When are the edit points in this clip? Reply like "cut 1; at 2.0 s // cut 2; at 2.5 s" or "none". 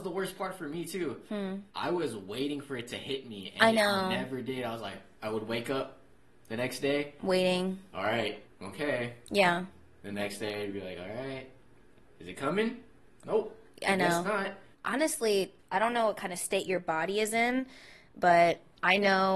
none